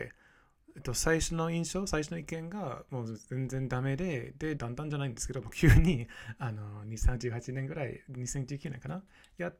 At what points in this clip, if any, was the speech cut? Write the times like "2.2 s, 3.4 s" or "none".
4.6 s